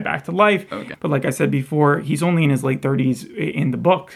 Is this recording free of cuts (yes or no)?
no